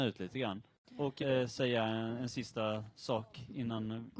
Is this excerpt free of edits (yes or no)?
no